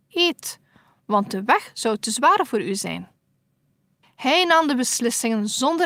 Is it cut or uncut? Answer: uncut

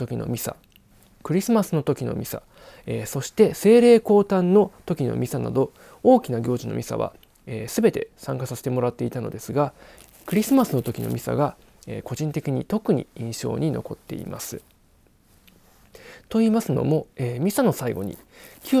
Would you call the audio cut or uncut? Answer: uncut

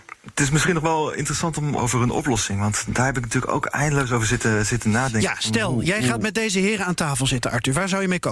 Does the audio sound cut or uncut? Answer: cut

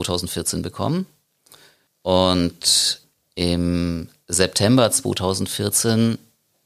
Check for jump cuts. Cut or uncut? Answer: uncut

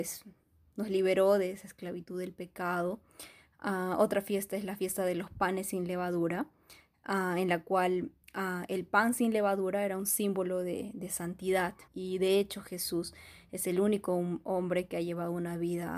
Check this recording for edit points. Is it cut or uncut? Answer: cut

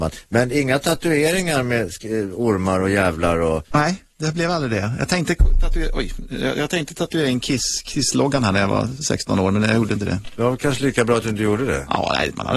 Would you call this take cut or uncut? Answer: uncut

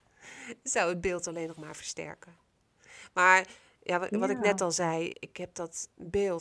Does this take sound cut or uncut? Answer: cut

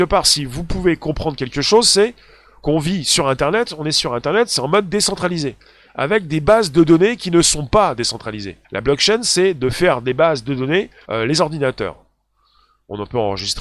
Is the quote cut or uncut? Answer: cut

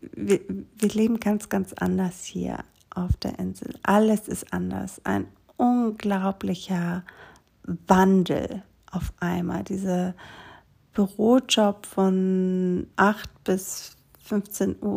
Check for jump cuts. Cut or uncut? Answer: cut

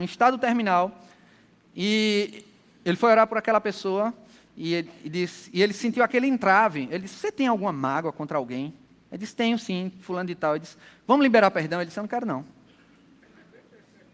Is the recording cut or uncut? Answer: uncut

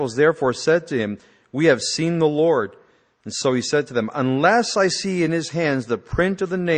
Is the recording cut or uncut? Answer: uncut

